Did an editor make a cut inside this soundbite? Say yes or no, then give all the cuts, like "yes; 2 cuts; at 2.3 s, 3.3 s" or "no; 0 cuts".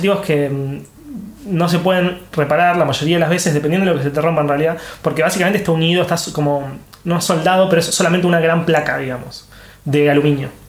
no; 0 cuts